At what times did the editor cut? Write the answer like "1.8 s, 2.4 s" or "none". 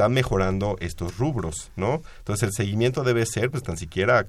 none

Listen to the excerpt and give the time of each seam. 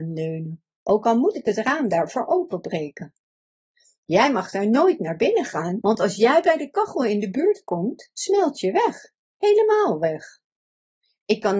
5.8 s

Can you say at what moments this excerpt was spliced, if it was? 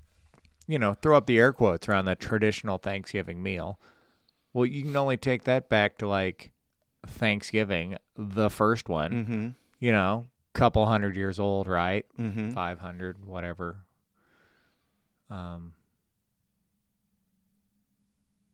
none

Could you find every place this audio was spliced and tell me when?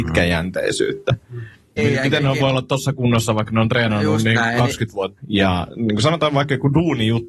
1.8 s, 5.2 s

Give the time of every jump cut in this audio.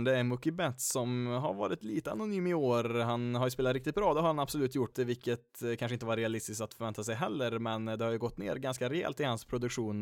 4.9 s

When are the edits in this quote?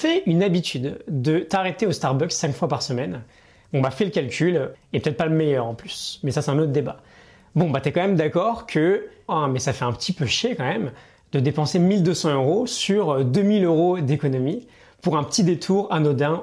4.7 s, 9.3 s

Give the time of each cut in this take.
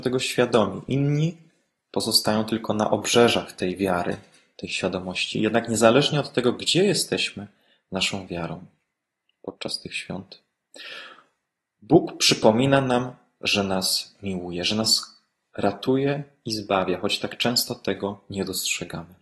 none

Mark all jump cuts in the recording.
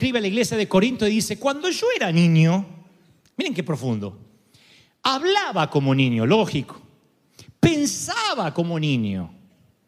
none

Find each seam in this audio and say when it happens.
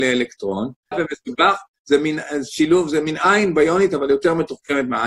0.9 s

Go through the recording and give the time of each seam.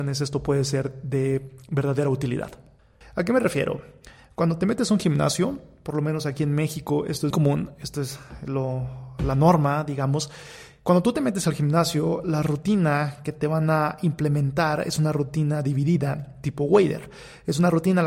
3.0 s, 7.3 s

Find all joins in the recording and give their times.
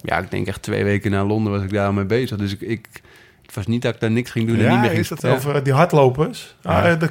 5.2 s

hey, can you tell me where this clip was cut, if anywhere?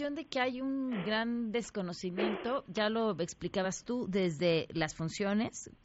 none

